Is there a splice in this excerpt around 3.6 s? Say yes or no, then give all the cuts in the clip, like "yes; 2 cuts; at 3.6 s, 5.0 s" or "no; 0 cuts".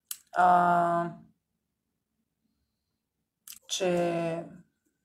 yes; 1 cut; at 3.6 s